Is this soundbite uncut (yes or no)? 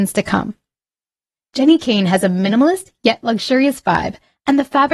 no